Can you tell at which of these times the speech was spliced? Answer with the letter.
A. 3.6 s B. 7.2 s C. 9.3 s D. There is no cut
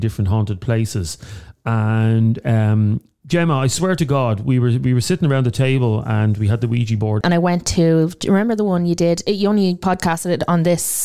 B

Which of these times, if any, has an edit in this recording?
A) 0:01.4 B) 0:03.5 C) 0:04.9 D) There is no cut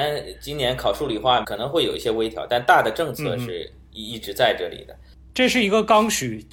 A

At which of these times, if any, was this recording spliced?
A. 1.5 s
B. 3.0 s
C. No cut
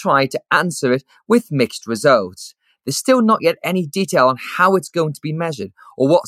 C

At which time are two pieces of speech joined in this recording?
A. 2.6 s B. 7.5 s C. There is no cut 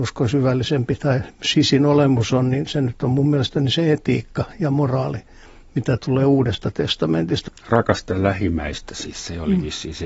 B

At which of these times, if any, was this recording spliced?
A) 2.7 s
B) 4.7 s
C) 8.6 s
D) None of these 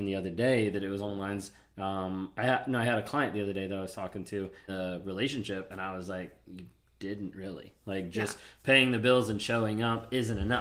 B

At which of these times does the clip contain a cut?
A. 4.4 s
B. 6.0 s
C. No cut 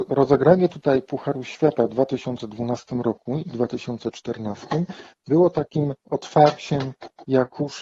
B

